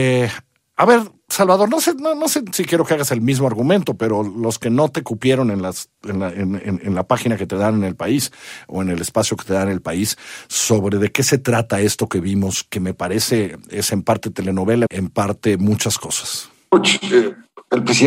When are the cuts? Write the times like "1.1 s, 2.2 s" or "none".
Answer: 14.9 s